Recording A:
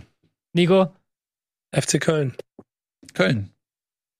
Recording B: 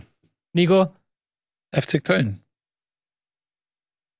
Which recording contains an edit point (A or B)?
B